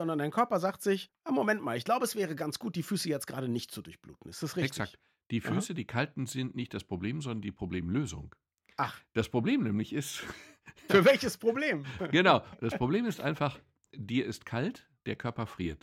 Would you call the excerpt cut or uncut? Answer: uncut